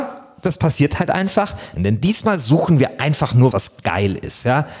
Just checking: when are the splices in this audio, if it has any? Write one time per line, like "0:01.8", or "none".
0:01.8
0:03.5